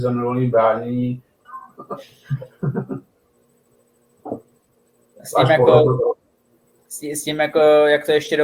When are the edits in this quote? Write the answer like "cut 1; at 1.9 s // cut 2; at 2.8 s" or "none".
cut 1; at 1.4 s